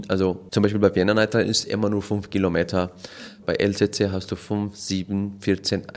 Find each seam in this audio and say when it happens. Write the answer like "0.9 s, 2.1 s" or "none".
3.4 s